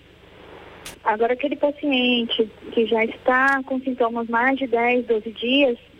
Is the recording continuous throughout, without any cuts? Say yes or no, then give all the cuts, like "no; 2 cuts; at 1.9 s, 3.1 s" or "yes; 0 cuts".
no; 1 cut; at 0.9 s